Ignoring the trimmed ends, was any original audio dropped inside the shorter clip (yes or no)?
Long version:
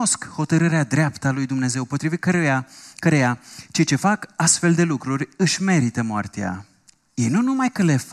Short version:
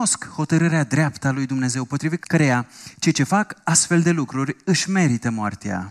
yes